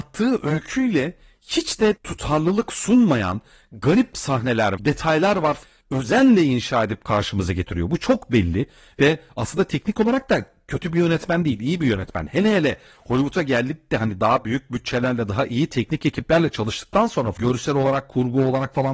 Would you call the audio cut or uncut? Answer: cut